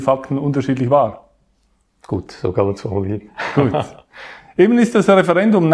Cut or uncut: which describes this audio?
uncut